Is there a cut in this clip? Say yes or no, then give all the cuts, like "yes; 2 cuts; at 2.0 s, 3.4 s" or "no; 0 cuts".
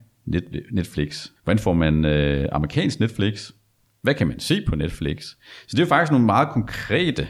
yes; 1 cut; at 1.4 s